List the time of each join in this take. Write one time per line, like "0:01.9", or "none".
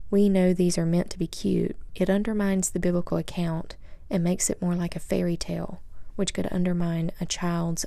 0:01.9